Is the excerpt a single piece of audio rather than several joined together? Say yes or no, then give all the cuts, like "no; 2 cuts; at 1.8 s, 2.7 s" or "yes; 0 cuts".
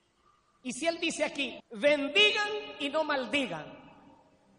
no; 1 cut; at 1.6 s